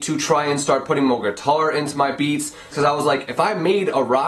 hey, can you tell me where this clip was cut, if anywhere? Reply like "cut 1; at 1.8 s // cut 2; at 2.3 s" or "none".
cut 1; at 2.7 s